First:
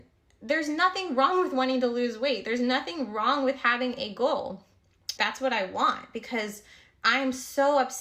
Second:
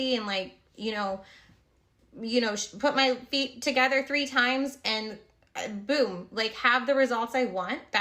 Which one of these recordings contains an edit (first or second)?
first